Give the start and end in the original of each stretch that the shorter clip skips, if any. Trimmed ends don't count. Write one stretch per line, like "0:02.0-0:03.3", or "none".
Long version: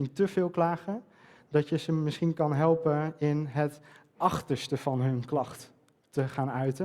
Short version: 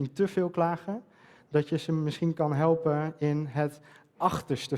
none